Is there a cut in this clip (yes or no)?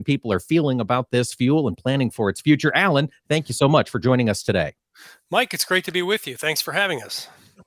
no